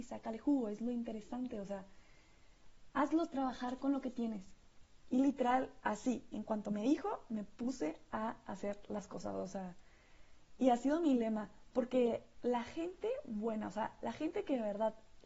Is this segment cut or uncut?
uncut